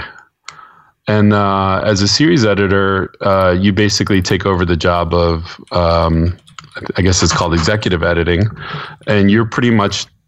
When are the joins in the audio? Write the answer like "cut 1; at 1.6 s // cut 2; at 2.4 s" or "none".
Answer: none